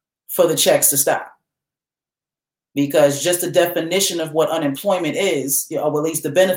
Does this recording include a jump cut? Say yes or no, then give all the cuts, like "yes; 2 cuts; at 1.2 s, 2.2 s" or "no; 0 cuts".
no; 0 cuts